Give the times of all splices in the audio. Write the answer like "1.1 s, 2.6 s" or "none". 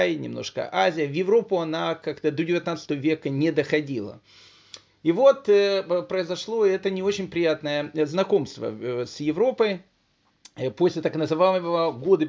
none